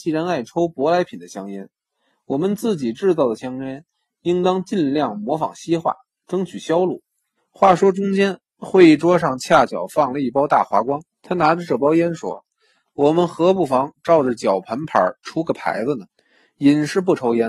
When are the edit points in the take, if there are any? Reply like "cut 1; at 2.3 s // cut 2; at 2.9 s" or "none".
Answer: cut 1; at 7.4 s // cut 2; at 11.1 s // cut 3; at 16.1 s